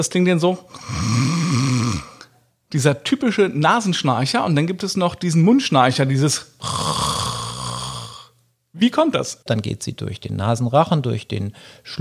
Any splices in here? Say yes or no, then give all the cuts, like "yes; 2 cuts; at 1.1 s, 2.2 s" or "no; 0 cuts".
yes; 1 cut; at 9.5 s